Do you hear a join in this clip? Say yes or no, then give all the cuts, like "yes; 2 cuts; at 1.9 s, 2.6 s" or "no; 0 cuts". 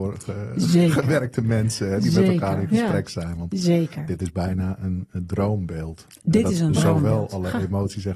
no; 0 cuts